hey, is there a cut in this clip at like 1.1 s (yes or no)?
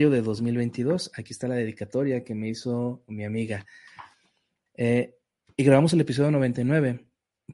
no